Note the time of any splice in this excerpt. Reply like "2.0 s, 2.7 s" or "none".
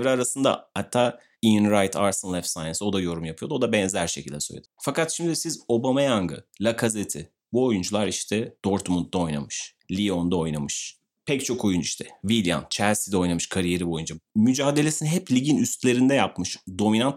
4.7 s

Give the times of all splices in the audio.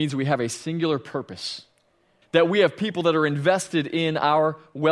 2.2 s

